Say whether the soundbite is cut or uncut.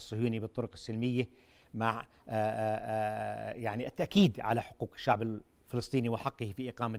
uncut